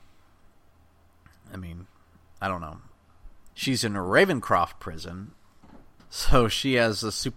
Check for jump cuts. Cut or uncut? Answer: cut